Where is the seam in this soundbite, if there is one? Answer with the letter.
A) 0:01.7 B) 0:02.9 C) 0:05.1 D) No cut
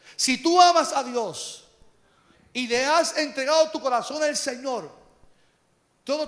D